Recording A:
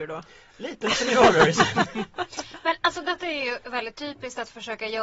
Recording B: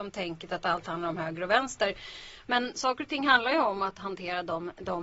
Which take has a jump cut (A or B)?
B